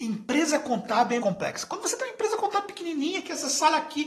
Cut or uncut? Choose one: cut